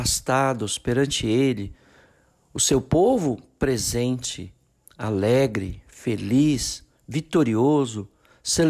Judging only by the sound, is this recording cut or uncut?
uncut